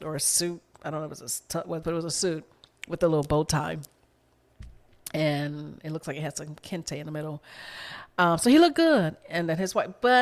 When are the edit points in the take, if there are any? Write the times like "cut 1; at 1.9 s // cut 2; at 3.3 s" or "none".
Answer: cut 1; at 1.8 s